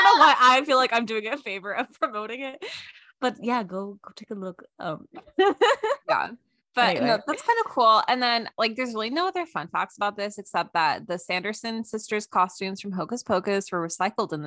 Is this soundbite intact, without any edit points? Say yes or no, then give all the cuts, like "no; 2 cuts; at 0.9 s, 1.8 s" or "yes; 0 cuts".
yes; 0 cuts